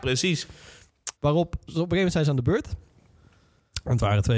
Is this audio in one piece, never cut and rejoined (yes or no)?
no